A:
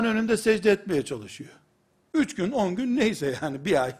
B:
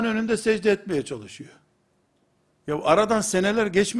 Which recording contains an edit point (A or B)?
A